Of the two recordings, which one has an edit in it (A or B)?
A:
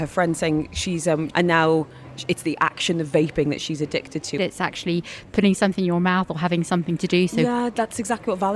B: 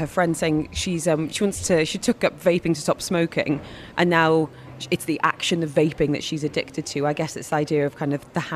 A